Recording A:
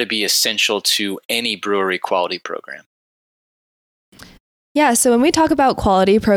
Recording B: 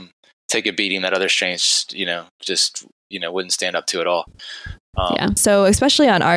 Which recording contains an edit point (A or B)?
B